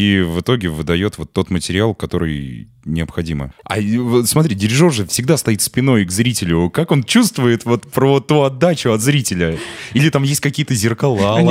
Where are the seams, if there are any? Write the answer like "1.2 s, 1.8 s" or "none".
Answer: 3.5 s